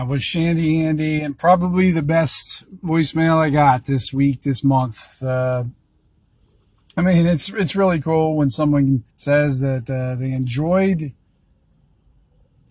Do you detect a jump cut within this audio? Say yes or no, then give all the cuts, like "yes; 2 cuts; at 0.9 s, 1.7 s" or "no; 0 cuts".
yes; 1 cut; at 9.1 s